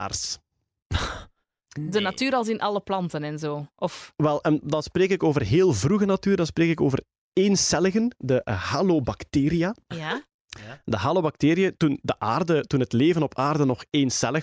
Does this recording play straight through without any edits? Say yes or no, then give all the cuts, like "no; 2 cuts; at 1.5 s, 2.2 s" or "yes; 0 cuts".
yes; 0 cuts